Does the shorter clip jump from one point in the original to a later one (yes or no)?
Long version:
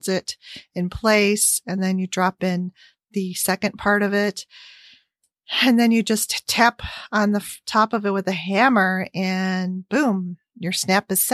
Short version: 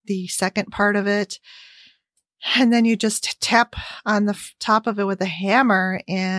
no